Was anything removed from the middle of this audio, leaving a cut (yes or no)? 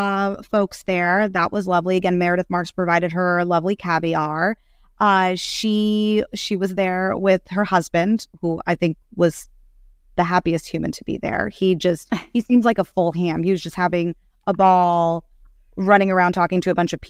no